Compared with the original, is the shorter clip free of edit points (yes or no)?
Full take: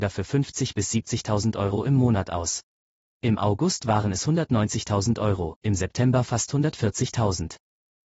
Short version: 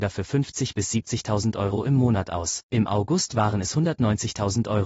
no